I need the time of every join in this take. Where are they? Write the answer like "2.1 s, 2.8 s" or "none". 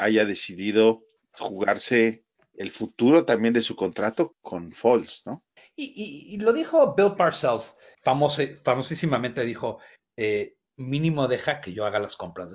4.3 s, 7.9 s, 10.7 s